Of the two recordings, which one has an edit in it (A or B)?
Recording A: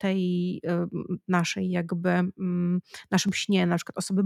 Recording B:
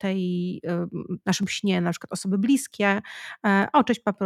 B